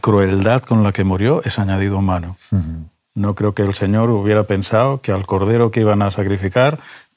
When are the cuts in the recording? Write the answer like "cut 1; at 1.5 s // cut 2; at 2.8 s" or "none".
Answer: none